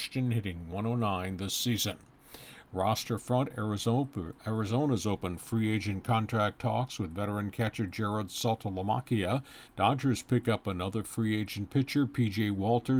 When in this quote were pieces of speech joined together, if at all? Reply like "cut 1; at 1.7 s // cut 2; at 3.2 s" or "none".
cut 1; at 9.7 s